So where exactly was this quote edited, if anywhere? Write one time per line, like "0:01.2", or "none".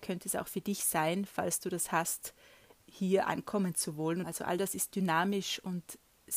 0:04.2

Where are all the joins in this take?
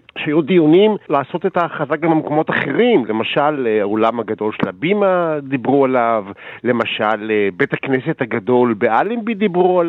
none

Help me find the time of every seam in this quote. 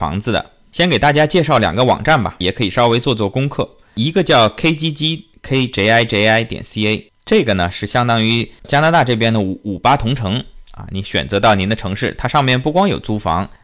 0:02.4

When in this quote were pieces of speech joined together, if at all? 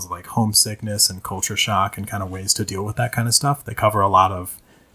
none

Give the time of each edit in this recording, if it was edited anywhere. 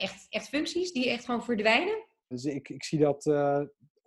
0:02.3

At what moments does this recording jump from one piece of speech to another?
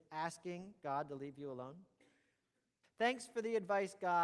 0:02.8

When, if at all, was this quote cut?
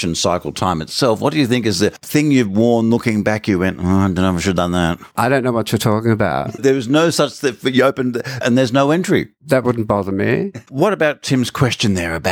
0:08.4

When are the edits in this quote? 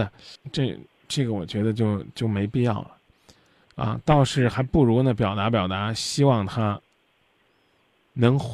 none

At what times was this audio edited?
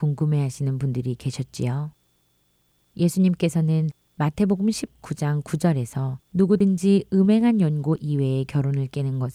0:06.2

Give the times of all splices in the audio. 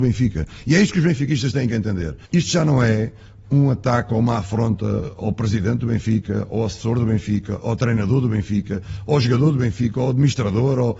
0:02.2

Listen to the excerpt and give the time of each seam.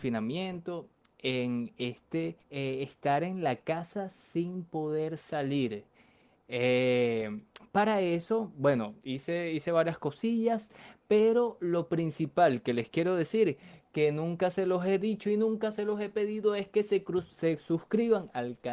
0:02.4

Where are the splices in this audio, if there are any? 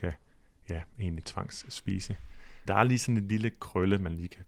0:02.7

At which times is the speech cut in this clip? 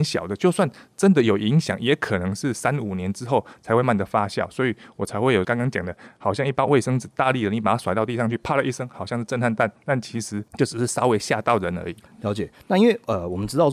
0:03.8

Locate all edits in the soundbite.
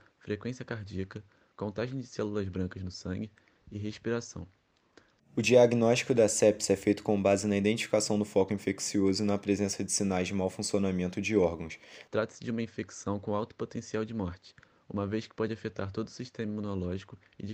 0:05.2
0:12.1

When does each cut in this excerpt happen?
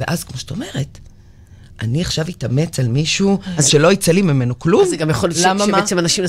none

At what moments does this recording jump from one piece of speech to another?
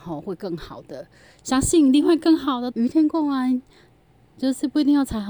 0:02.7

